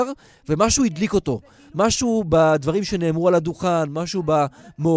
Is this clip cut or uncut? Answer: uncut